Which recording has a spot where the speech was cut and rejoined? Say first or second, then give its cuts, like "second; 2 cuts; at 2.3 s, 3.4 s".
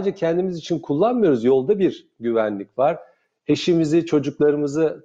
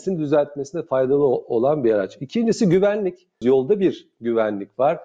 second; 1 cut; at 3.4 s